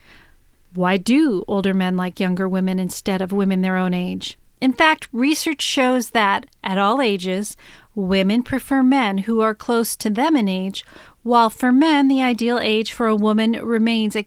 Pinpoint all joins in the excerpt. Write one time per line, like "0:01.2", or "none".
0:04.5